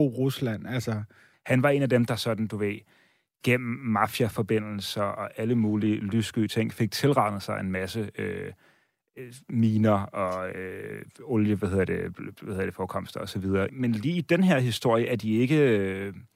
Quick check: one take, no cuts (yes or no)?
no